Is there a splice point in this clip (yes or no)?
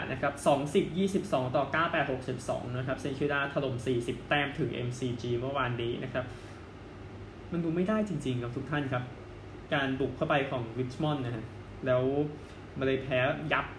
no